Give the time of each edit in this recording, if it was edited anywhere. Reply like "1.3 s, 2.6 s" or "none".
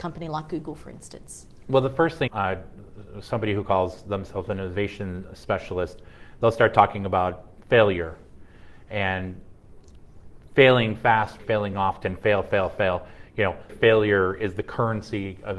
2.3 s, 11.4 s, 13.7 s